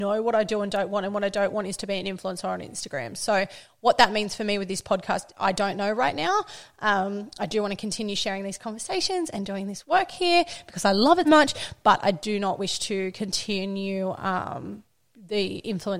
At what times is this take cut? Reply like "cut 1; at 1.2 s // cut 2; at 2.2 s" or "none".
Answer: cut 1; at 11.2 s